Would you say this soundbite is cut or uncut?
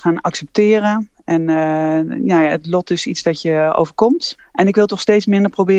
cut